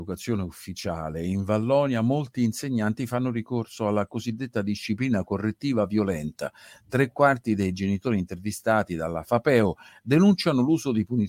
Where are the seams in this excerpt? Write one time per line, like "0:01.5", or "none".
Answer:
none